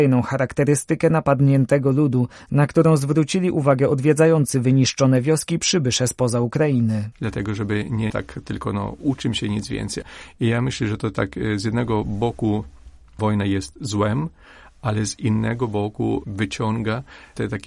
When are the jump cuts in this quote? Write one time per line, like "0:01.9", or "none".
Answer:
0:07.1